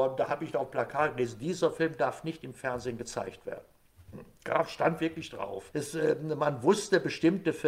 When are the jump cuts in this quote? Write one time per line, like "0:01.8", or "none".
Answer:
0:05.7